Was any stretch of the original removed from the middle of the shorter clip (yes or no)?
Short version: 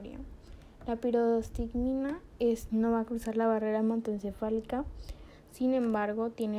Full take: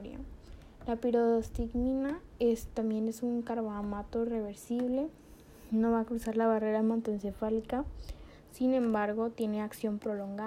yes